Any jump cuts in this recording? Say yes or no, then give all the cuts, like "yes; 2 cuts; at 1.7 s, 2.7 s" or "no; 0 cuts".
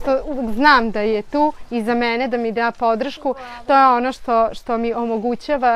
no; 0 cuts